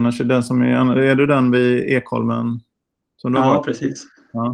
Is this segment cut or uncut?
uncut